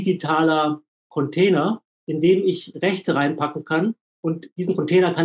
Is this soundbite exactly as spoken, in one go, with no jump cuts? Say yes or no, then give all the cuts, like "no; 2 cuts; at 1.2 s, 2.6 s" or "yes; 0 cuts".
yes; 0 cuts